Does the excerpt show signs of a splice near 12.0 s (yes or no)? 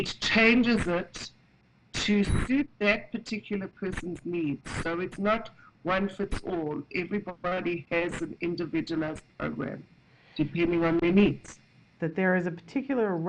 yes